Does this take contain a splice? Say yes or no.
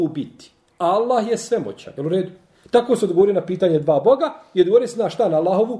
no